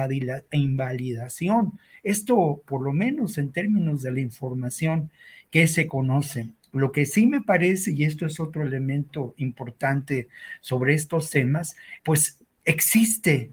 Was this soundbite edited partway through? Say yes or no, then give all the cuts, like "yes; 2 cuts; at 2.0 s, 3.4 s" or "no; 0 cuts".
yes; 1 cut; at 12.0 s